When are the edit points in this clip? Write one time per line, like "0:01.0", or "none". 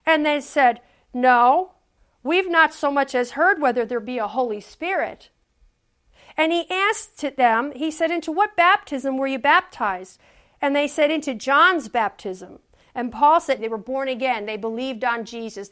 0:13.6